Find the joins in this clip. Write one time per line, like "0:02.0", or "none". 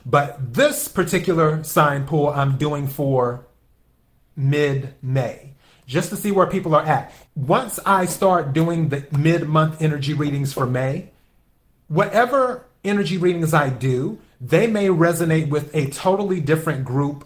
0:07.3